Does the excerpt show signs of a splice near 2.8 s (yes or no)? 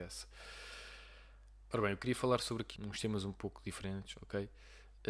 yes